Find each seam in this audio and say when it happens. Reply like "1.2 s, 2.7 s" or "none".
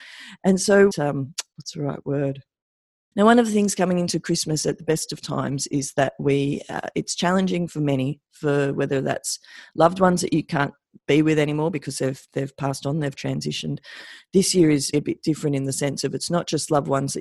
0.9 s, 3.1 s, 14.9 s